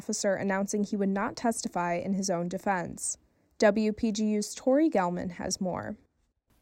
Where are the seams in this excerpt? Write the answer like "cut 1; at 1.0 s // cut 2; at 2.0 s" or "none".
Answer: none